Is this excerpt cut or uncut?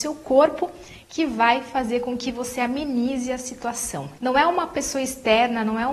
cut